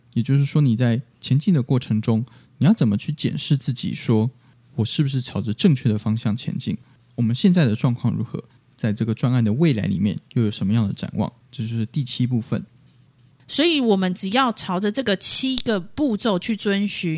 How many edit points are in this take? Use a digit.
0